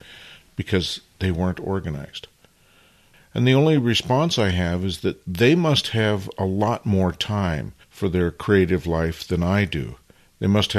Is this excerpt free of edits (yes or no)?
no